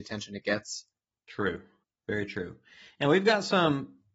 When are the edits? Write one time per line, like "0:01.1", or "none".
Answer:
none